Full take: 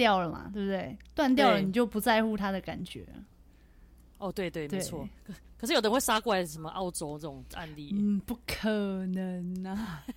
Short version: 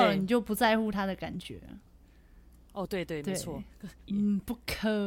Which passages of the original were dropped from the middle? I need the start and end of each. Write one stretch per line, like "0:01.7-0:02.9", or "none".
0:05.5-0:07.9